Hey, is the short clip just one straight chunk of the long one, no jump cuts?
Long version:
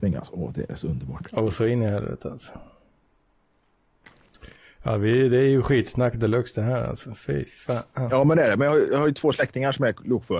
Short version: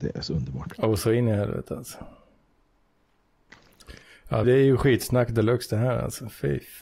no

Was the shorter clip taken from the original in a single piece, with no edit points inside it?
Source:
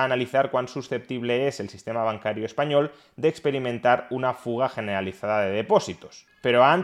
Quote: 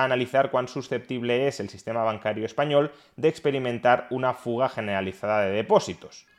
yes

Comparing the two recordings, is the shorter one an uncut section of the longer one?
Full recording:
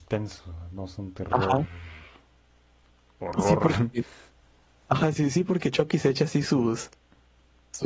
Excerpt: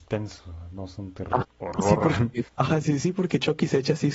no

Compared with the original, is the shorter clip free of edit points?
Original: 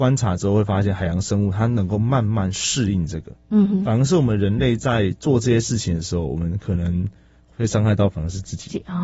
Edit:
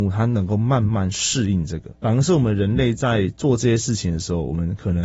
no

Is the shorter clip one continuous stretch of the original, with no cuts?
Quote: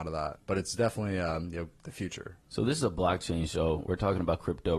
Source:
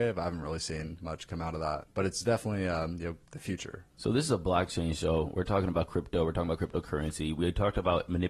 yes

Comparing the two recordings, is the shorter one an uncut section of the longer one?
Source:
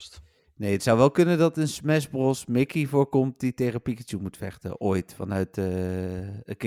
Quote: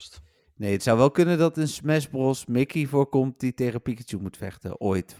yes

